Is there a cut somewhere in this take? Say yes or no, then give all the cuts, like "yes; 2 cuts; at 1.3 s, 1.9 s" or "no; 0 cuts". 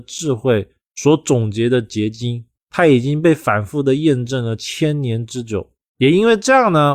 yes; 1 cut; at 5.9 s